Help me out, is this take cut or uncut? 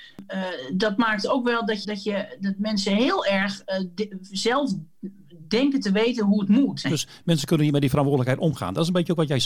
cut